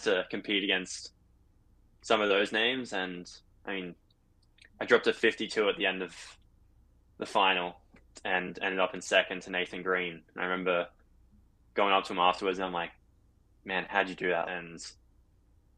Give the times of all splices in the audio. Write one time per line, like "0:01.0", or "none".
0:14.4